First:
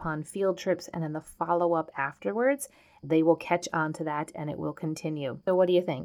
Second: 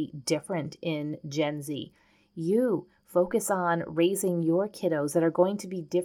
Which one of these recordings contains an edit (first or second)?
first